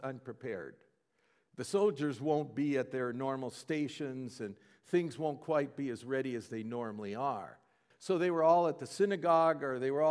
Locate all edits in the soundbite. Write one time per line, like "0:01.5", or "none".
0:07.9